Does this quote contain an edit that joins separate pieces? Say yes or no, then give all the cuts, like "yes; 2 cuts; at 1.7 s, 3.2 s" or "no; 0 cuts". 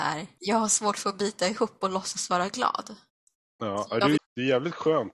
yes; 1 cut; at 4.2 s